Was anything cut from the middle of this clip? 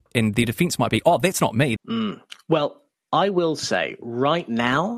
yes; 1 cut; at 1.8 s

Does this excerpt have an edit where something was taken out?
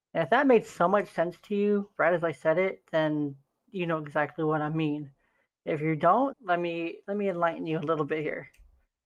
yes; 1 cut; at 6.3 s

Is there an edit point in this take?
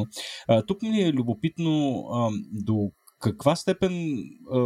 no; 0 cuts

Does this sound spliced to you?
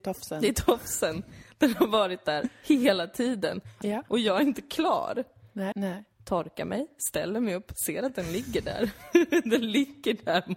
yes; 2 cuts; at 3.8 s, 5.7 s

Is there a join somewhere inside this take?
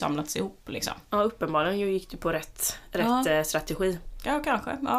no; 0 cuts

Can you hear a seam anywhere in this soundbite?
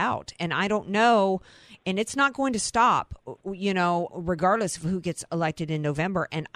yes; 1 cut; at 4.1 s

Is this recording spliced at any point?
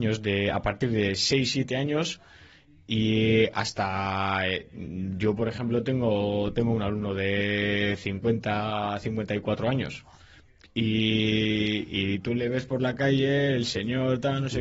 no; 0 cuts

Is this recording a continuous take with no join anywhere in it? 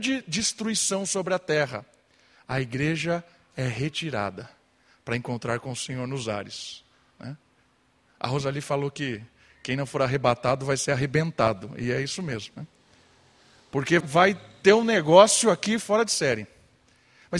no; 1 cut; at 14.0 s

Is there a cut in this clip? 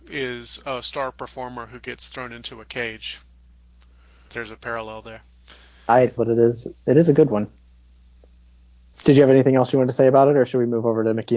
yes; 3 cuts; at 4.3 s, 6.2 s, 8.9 s

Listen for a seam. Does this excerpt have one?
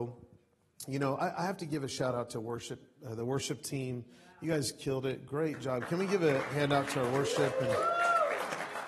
no; 0 cuts

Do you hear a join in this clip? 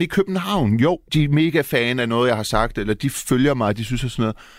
yes; 1 cut; at 1.1 s

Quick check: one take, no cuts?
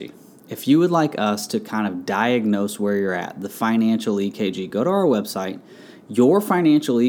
yes; 0 cuts

